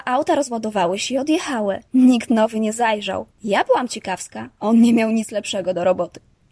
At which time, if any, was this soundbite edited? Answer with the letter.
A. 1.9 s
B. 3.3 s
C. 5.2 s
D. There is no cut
B